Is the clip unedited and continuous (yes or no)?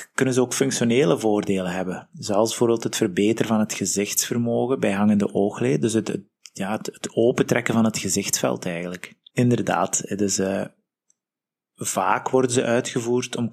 no